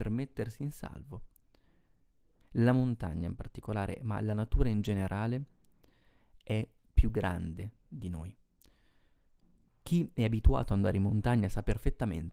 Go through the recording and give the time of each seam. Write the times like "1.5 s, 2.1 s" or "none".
2.4 s, 9.7 s